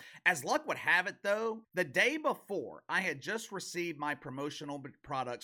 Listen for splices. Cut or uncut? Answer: cut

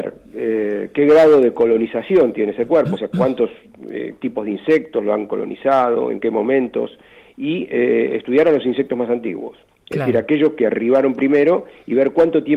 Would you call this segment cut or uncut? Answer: uncut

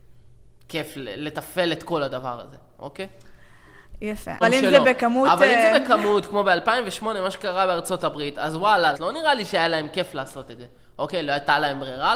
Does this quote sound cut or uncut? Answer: cut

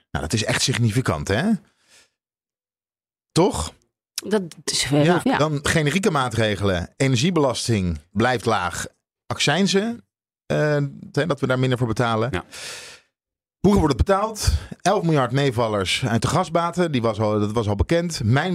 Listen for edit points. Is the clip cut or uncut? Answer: cut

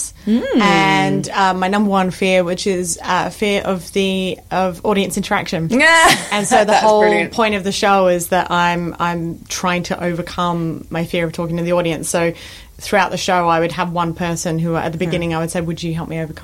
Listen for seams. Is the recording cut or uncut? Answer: uncut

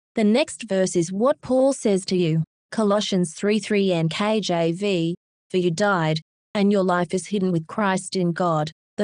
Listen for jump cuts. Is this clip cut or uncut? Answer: uncut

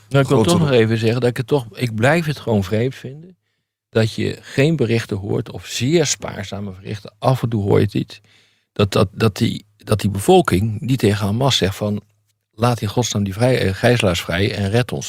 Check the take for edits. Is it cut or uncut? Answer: uncut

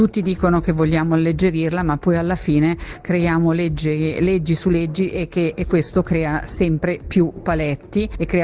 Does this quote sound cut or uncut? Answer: uncut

